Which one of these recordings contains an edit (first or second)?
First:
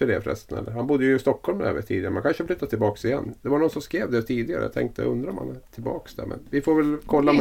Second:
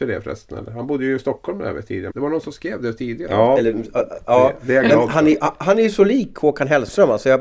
second